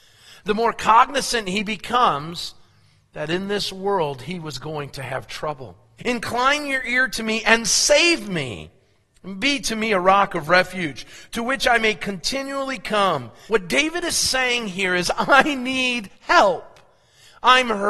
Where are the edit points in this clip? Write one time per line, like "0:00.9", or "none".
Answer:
0:06.0
0:13.5